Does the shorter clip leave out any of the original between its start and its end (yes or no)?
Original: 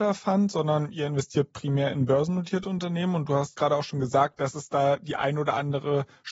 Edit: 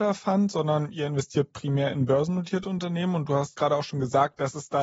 no